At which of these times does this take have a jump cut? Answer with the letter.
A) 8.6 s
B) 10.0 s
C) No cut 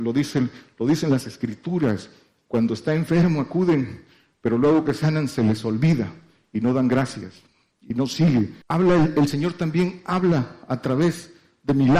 A